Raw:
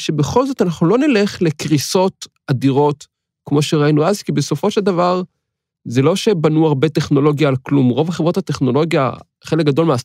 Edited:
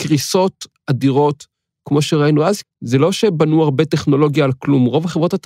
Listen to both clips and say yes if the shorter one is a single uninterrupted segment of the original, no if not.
no